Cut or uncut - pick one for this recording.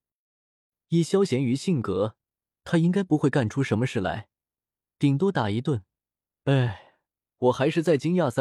cut